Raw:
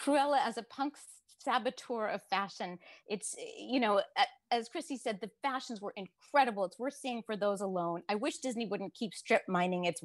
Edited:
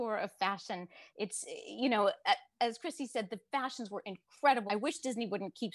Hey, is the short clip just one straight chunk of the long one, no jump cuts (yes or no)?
no